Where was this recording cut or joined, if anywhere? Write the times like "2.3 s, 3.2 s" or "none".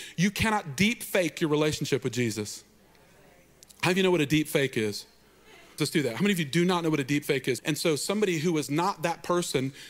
5.8 s, 7.6 s